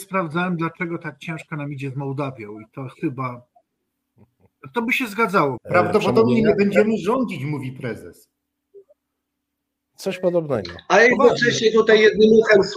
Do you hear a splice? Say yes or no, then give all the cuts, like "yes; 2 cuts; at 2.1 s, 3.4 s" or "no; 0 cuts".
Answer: yes; 1 cut; at 5.6 s